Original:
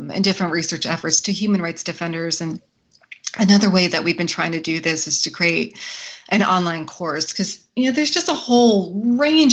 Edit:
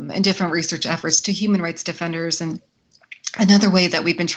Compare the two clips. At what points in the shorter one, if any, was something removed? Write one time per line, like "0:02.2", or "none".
none